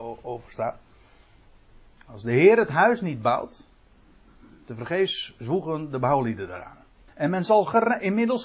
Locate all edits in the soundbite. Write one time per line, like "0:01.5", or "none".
0:07.1